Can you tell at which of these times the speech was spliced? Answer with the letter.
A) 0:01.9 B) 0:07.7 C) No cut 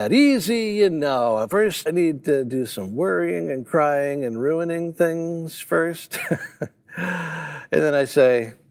A